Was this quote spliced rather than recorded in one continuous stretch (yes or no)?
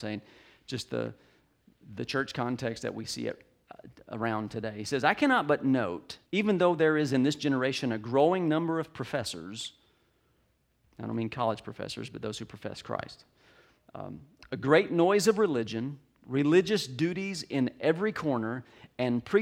yes